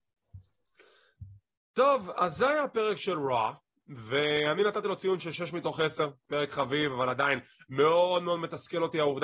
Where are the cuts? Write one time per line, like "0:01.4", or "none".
none